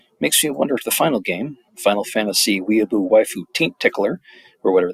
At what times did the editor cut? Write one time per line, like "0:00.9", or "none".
none